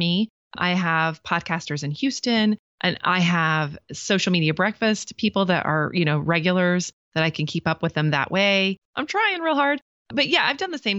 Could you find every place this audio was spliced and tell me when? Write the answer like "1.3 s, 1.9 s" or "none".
8.8 s